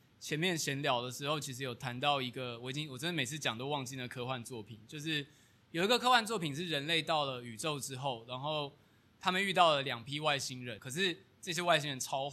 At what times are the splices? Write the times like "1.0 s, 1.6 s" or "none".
10.8 s